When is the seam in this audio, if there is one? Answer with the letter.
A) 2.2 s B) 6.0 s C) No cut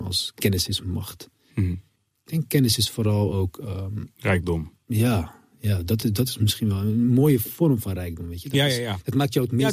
C